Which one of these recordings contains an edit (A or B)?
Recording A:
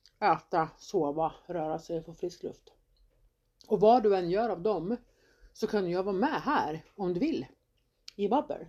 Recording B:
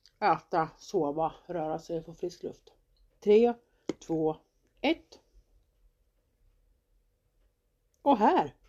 B